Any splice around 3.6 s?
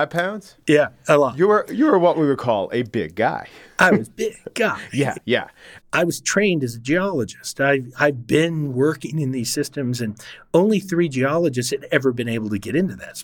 no; 1 cut; at 5.8 s

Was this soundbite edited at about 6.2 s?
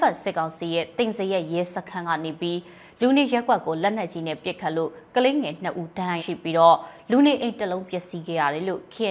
yes; 1 cut; at 6.2 s

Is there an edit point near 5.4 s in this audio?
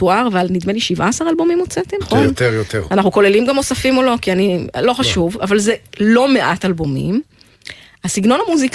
no; 1 cut; at 2.0 s

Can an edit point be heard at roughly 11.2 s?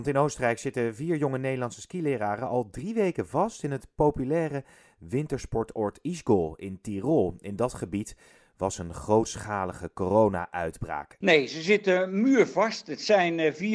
yes; 1 cut; at 11.2 s

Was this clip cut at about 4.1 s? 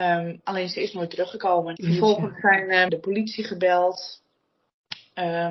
no; 2 cuts; at 1.8 s, 2.9 s

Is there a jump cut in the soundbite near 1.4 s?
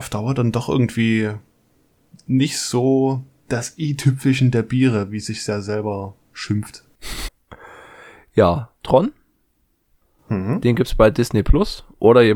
no; 2 cuts; at 7.3 s, 8.8 s

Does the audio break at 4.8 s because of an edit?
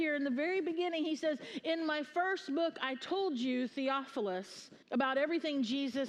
yes; 1 cut; at 4.8 s

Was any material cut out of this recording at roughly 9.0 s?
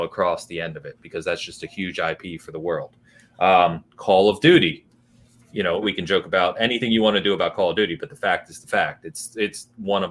no; 1 cut; at 5.8 s

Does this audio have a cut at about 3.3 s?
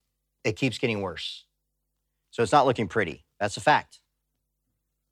yes; 2 cuts; at 2.2 s, 3.3 s

